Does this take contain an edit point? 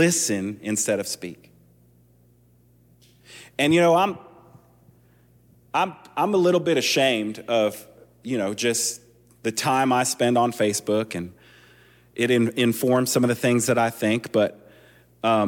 no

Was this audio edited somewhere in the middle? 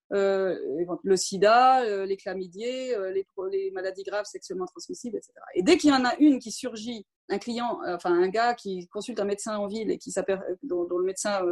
yes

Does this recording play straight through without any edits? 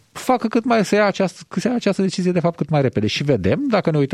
yes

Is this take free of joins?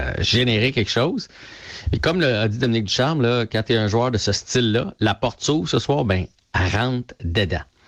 yes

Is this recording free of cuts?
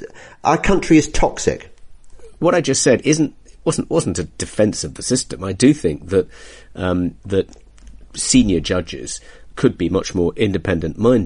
no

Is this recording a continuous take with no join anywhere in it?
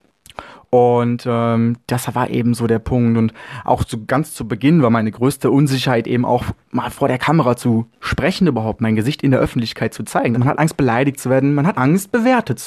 no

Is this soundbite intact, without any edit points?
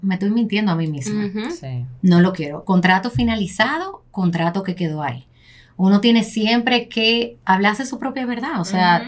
yes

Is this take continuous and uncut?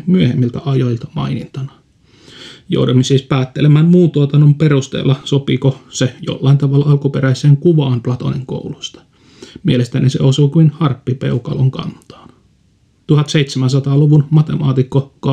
no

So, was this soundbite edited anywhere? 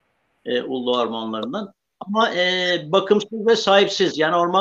no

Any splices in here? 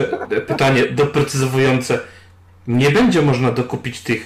no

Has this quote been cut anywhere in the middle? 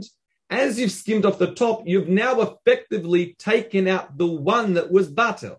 no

